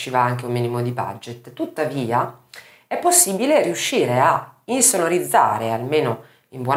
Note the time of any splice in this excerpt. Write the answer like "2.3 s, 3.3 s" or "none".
none

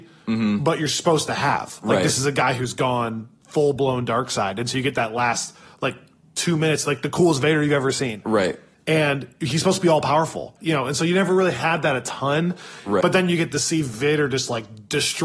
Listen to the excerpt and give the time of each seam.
13.0 s

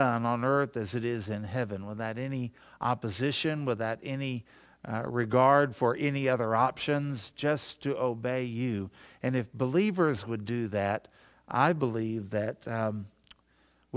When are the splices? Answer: none

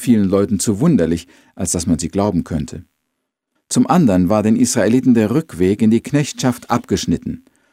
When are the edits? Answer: 3.6 s

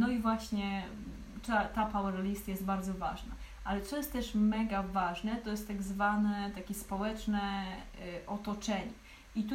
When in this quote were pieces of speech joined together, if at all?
none

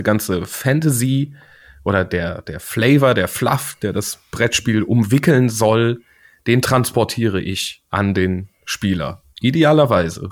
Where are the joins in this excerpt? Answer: 7.9 s

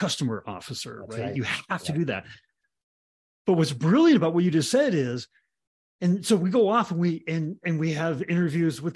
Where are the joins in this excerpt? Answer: none

